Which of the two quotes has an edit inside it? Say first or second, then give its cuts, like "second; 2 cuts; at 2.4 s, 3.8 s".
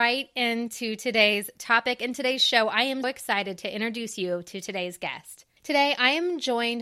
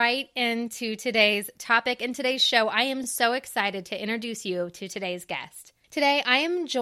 first; 1 cut; at 3.0 s